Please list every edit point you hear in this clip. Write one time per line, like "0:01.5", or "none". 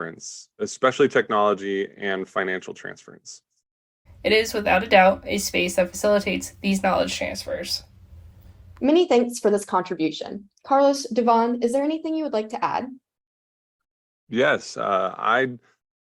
0:04.1